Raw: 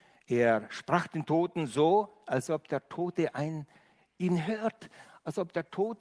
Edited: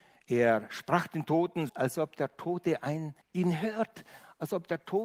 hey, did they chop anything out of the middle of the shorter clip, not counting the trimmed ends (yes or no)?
yes